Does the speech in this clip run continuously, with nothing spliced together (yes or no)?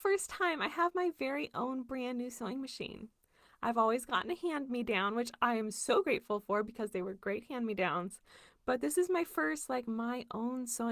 yes